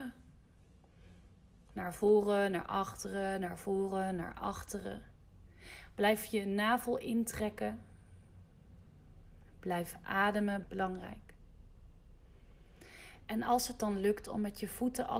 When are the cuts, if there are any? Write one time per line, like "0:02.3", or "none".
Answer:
0:10.6